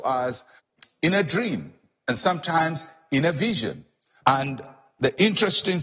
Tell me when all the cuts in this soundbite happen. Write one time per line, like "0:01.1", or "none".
0:04.2